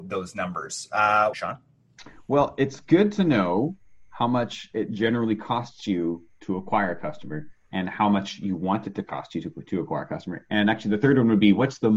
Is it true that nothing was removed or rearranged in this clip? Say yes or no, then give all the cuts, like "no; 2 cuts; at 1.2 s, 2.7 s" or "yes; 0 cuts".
no; 1 cut; at 1.3 s